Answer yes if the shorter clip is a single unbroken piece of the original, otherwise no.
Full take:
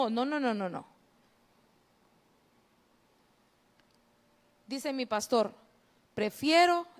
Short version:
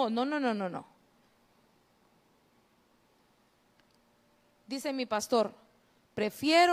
yes